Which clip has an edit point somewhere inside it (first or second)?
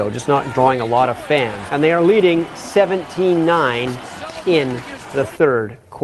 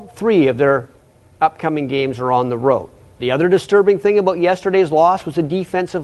first